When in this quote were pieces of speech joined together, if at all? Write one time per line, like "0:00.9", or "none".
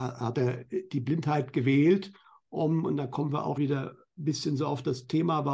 0:03.6